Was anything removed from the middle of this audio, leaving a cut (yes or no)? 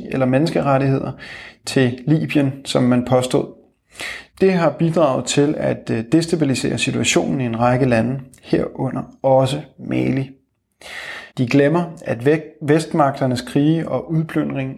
yes